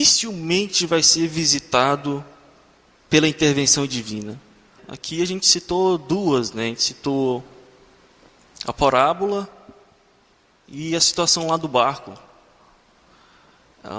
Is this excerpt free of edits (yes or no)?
no